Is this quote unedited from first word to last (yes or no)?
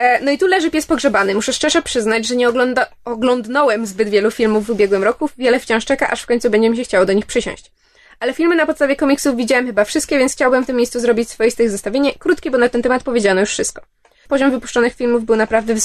no